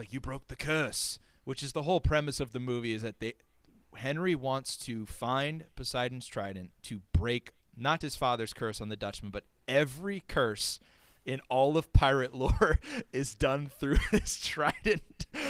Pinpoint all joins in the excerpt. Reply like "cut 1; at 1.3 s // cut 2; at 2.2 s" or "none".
cut 1; at 6.7 s // cut 2; at 8.0 s